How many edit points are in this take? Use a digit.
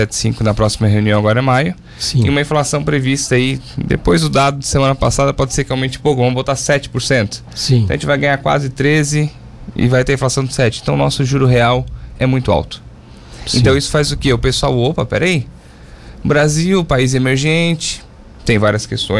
0